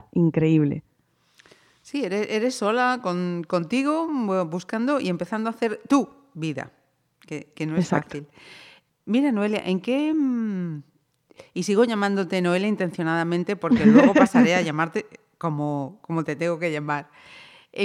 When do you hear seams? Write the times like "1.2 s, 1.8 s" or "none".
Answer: none